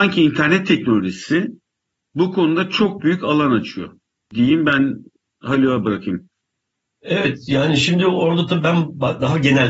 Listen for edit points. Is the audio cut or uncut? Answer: uncut